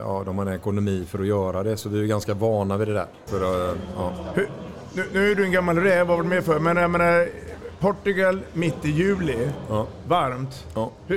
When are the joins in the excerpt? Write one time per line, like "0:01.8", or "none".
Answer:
0:03.3